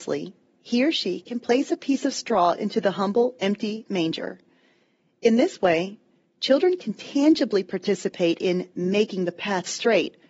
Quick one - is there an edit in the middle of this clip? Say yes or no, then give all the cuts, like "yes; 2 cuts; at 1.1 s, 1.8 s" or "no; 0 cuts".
no; 0 cuts